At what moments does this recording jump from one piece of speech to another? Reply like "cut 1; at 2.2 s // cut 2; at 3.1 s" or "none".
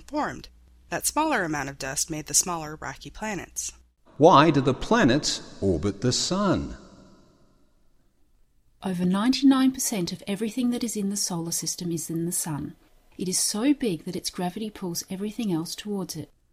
cut 1; at 4.1 s